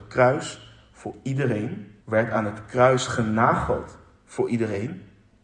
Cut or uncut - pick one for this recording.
cut